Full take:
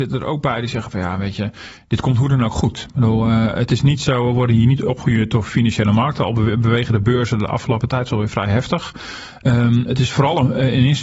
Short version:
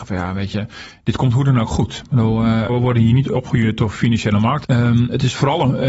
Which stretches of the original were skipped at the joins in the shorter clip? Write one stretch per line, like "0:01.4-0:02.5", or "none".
0:03.5-0:04.2
0:06.2-0:09.4